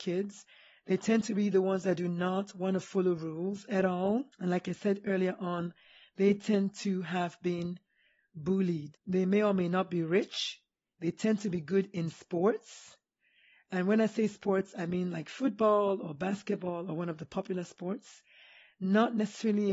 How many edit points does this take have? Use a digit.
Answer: 2